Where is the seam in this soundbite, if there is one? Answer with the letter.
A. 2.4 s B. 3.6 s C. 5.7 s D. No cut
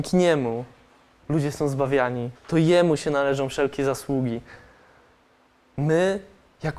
A